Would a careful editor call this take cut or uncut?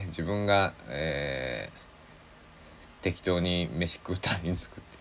uncut